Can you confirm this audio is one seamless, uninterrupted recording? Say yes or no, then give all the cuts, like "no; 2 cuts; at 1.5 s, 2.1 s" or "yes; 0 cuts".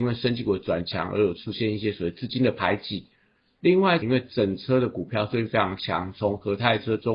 no; 1 cut; at 4.0 s